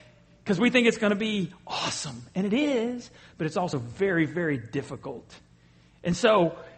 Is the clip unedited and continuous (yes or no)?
yes